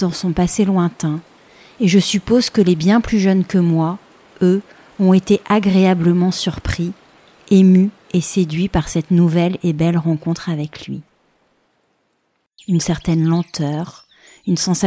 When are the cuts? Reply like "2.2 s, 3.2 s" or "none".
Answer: 12.6 s